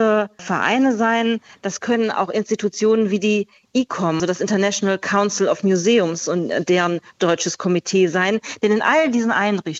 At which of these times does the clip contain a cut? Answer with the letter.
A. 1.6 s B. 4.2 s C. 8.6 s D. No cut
B